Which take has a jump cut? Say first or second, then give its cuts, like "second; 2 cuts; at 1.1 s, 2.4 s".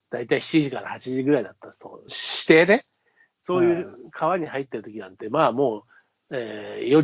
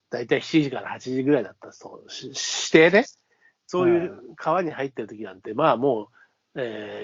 first; 1 cut; at 2.1 s